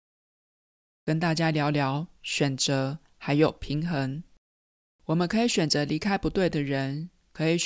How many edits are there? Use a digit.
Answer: 2